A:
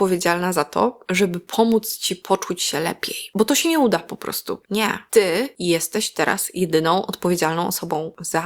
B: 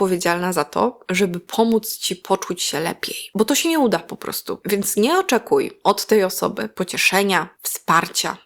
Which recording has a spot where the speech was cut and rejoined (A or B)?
A